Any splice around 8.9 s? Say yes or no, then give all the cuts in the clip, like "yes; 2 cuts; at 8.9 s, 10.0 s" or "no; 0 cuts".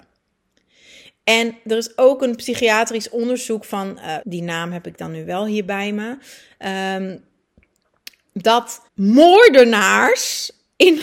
yes; 2 cuts; at 4.2 s, 8.9 s